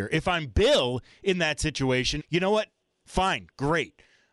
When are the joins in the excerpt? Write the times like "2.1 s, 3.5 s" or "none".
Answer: 2.2 s